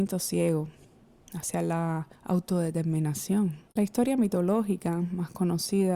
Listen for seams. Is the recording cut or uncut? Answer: cut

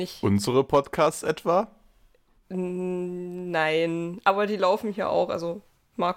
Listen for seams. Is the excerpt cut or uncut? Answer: uncut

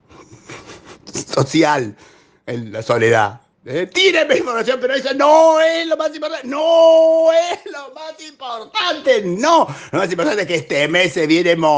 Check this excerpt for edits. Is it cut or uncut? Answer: uncut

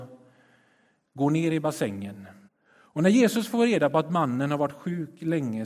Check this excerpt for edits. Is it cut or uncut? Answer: cut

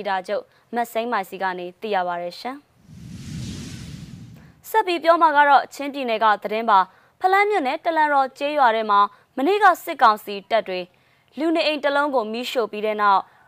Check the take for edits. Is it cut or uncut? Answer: uncut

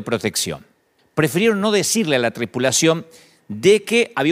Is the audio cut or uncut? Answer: cut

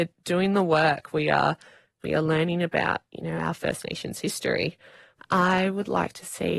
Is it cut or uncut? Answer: cut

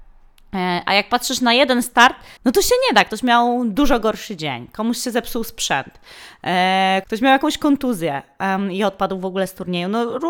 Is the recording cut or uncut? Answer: cut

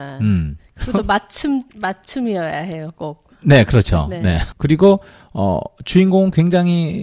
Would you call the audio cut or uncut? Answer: cut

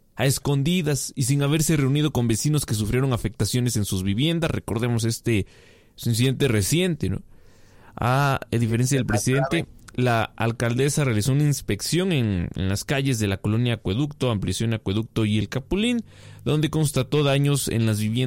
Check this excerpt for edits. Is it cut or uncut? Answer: uncut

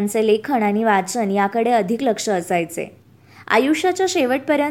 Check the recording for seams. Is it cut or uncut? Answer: uncut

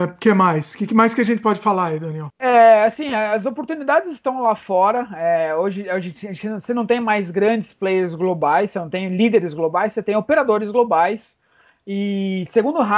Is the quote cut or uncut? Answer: cut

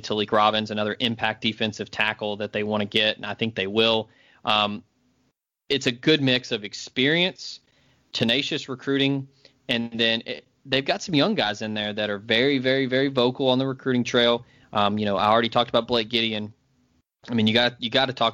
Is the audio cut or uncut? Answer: uncut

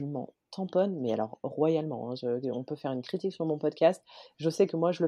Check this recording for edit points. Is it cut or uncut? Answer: uncut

